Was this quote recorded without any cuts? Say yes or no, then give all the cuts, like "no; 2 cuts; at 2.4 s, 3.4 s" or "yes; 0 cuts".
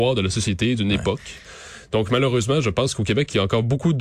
yes; 0 cuts